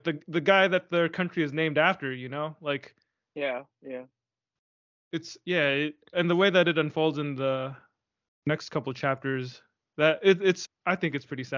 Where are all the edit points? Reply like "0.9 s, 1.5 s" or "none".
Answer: 6.1 s, 10.6 s